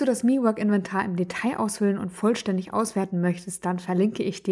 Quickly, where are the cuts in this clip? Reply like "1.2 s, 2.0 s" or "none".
none